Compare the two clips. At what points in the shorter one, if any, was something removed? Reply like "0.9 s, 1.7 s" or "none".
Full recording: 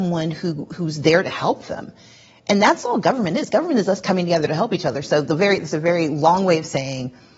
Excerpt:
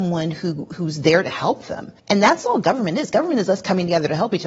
2.0 s